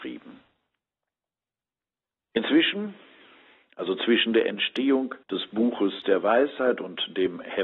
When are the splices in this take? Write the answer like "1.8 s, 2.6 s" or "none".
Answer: 2.2 s, 5.2 s